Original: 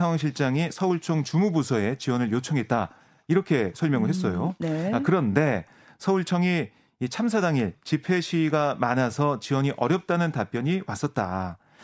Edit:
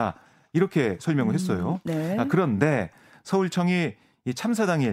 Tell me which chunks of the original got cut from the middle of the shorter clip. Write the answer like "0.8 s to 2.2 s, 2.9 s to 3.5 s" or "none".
none